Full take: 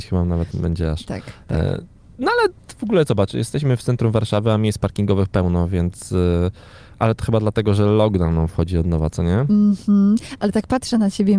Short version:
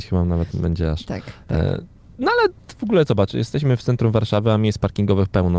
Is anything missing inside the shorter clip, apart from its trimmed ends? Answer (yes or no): no